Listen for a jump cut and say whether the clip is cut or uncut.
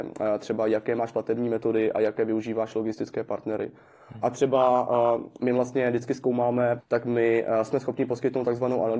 cut